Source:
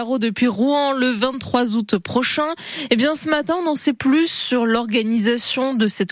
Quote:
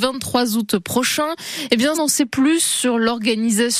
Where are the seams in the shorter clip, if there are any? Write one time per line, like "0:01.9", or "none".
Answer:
0:01.9